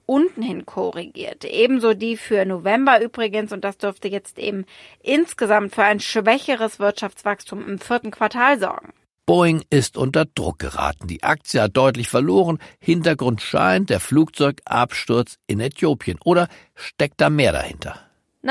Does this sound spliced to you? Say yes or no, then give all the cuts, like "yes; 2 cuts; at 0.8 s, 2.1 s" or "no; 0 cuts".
no; 0 cuts